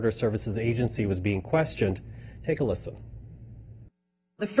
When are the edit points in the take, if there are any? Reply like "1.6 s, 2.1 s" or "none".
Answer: none

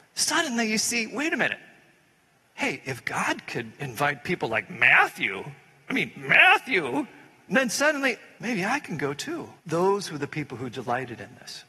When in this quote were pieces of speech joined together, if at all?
8.4 s, 9.6 s

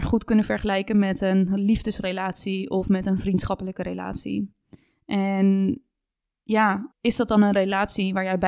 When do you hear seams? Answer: 6.9 s

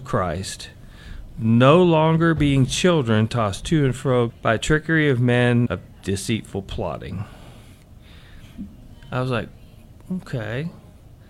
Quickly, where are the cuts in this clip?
4.3 s, 5.7 s

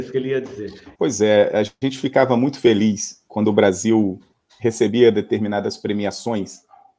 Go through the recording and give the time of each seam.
0.9 s

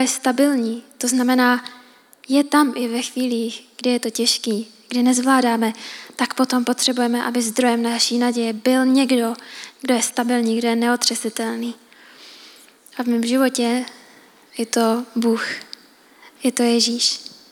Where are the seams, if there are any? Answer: none

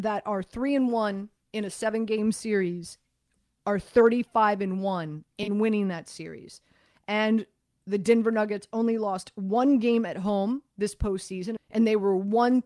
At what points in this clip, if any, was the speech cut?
11.6 s

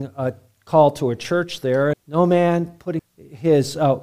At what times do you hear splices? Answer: 1.9 s, 3.0 s

